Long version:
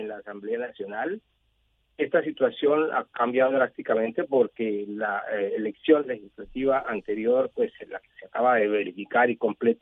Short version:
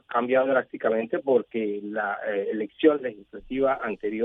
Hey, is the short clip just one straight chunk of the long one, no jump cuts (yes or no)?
yes